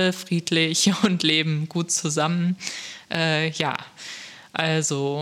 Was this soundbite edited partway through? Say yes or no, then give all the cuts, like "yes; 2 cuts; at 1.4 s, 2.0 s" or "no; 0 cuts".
no; 0 cuts